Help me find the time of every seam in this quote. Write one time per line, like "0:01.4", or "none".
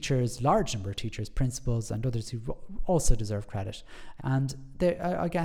0:04.2